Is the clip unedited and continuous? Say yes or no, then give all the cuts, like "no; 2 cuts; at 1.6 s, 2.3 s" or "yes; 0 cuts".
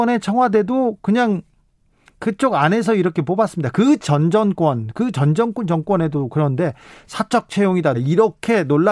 no; 1 cut; at 7.9 s